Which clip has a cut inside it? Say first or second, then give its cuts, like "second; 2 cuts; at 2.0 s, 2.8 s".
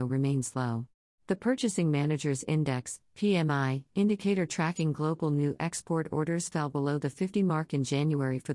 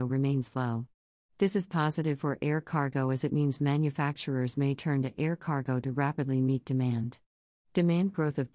first; 1 cut; at 1.1 s